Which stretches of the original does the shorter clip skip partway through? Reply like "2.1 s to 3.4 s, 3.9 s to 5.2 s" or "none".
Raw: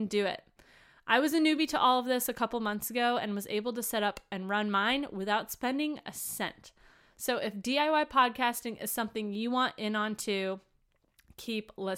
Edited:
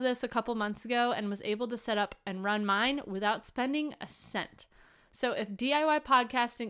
none